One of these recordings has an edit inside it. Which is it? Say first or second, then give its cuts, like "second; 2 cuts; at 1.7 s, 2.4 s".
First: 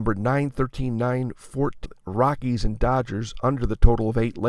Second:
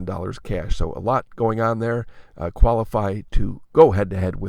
first; 1 cut; at 1.8 s